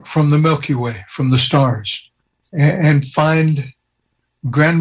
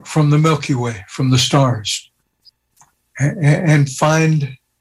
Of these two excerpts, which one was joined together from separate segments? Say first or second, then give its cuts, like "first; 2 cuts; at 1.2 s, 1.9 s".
first; 1 cut; at 2.5 s